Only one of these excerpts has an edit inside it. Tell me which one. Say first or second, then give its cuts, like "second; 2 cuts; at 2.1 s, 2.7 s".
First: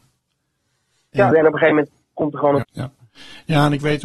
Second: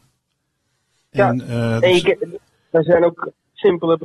first; 2 cuts; at 1.3 s, 2.6 s